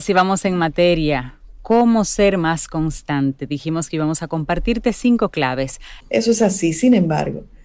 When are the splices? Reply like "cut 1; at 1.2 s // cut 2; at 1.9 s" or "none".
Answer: cut 1; at 6.0 s